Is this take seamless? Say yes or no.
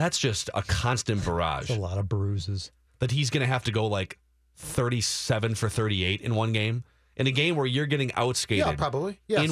no